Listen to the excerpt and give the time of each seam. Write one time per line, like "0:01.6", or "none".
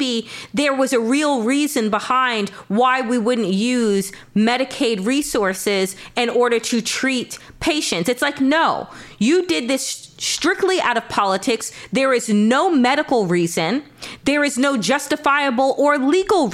none